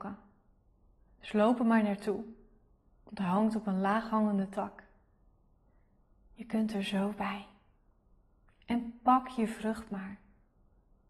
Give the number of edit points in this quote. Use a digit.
0